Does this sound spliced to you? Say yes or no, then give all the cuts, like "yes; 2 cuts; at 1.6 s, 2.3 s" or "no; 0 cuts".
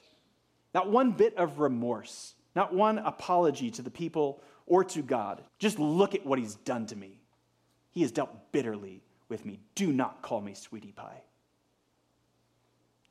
yes; 1 cut; at 5.5 s